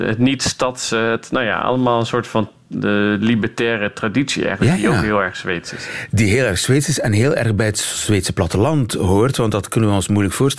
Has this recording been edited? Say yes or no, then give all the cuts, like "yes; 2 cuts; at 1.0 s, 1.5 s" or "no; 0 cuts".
no; 0 cuts